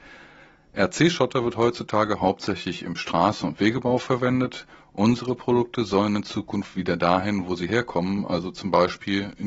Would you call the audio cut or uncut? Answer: uncut